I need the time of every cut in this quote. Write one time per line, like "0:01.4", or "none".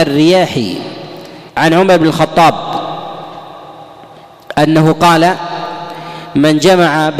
0:01.5

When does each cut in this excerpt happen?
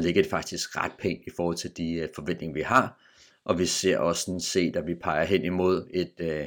none

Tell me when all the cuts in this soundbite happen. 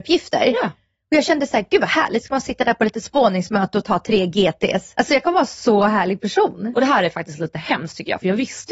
0:04.9
0:06.7

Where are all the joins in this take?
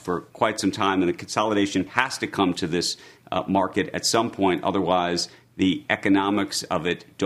0:01.9

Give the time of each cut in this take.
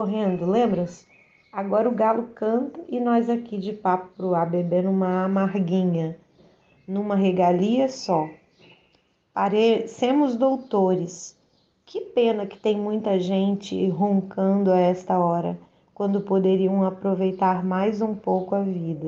none

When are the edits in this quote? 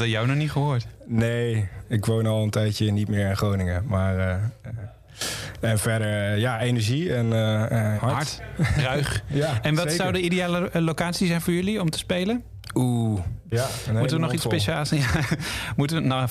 0:08.0
0:13.5

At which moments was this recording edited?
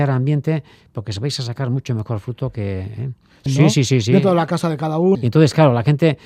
0:03.5
0:05.1

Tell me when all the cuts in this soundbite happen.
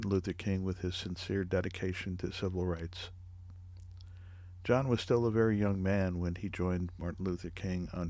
none

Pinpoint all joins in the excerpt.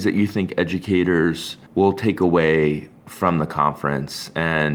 none

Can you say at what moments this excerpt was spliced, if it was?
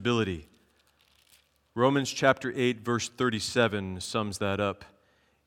none

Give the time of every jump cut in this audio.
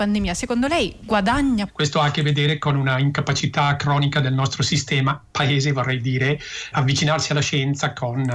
0:01.7
0:06.7

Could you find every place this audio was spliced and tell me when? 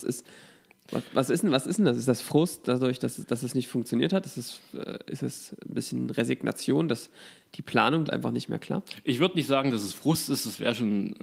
0:08.1

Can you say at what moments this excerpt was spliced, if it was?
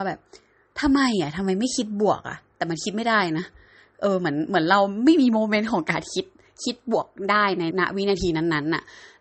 0:07.7

